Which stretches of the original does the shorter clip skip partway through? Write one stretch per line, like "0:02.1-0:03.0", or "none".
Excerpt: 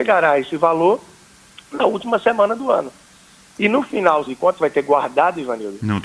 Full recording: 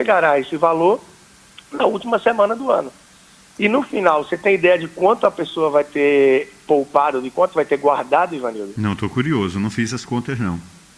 0:04.3-0:07.2

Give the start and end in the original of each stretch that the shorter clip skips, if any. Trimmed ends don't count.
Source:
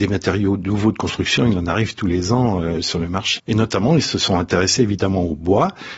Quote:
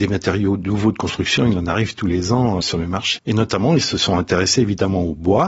0:02.6-0:02.8

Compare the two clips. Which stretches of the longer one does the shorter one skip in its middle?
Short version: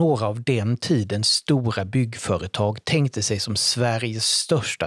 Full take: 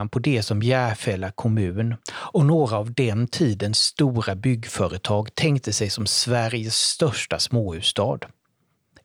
none

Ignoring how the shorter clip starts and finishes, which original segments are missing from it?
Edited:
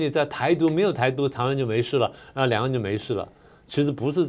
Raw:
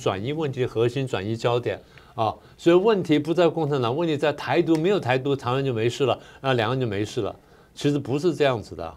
none

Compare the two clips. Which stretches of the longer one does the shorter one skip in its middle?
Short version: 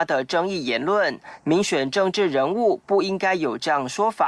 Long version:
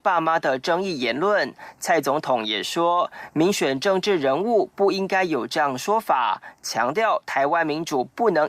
0:01.8-0:03.3

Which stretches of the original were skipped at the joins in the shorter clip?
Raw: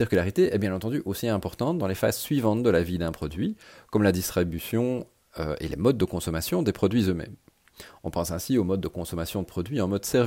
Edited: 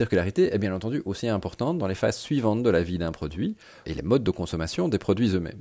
0:03.8-0:05.6

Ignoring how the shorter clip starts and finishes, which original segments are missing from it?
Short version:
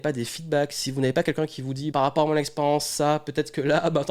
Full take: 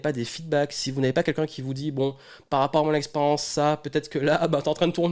0:01.9-0:02.5

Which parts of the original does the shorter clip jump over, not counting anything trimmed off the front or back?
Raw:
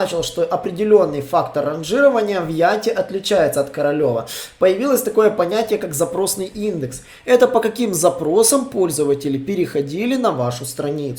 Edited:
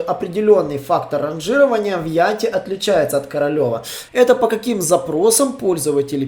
0:04.5-0:07.2

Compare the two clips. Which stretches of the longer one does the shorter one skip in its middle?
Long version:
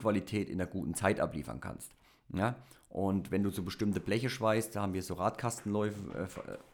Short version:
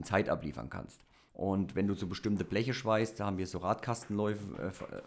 0:02.2-0:02.8

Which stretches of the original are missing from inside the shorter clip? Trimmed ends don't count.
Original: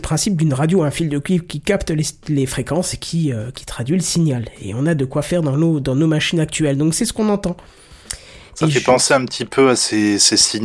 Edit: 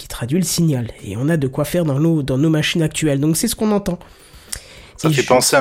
none

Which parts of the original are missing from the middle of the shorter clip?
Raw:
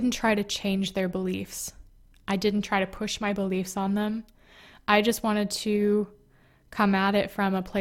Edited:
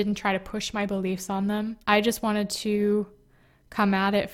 0:04.3-0:04.8

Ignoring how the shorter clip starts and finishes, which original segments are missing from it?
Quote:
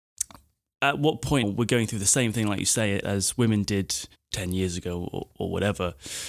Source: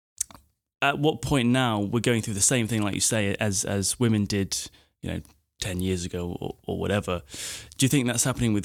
0:01.4-0:01.8
0:03.4-0:03.6
0:04.8-0:05.4

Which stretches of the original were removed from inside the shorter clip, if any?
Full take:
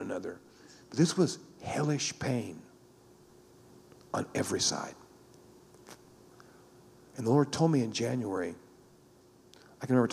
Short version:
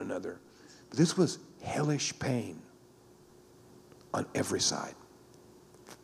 none

